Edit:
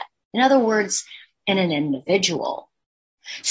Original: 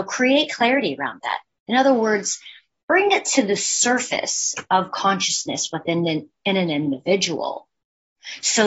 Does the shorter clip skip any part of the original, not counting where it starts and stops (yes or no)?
yes